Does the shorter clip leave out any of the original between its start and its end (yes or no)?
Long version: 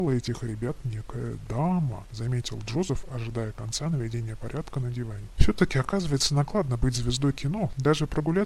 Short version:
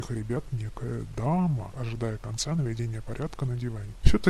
yes